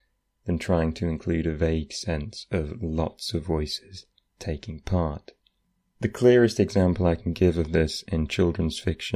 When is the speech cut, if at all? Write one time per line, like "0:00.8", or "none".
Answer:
0:06.0